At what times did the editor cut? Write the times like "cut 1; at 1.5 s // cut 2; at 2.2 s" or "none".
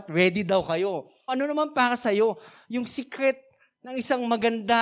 cut 1; at 1.3 s